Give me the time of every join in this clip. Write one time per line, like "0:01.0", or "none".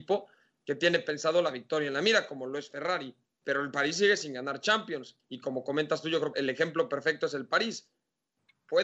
0:03.3
0:05.2
0:06.3